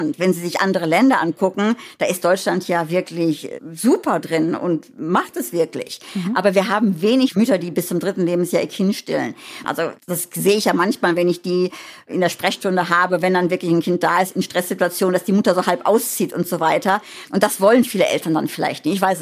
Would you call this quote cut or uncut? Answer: cut